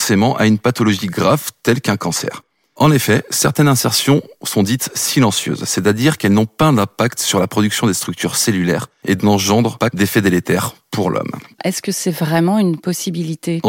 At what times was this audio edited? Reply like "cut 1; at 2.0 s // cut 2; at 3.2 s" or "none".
cut 1; at 9.2 s // cut 2; at 11.6 s